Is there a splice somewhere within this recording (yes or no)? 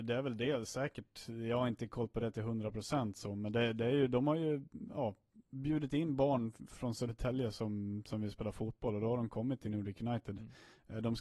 no